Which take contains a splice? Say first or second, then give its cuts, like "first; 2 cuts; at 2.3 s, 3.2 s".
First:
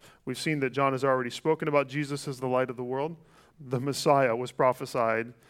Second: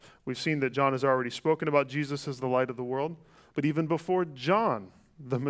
first; 1 cut; at 3.5 s